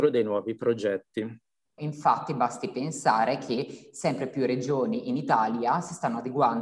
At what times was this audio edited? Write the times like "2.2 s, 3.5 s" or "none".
1.8 s